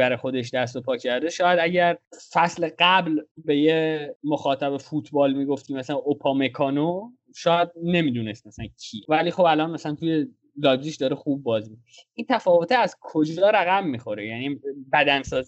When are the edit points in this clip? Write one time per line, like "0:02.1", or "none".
none